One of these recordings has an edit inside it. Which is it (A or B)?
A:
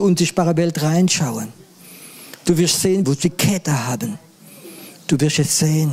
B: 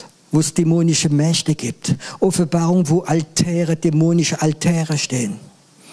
A